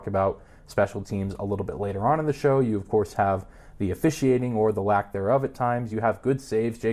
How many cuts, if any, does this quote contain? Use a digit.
0